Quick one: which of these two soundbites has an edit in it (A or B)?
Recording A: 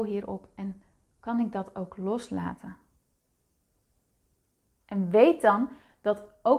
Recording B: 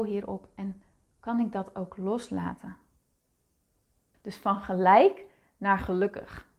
B